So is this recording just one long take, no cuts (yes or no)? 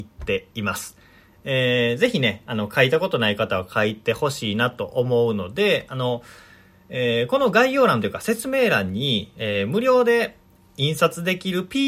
yes